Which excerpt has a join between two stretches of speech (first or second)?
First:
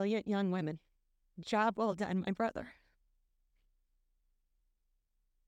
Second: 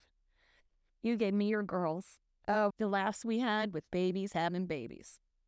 second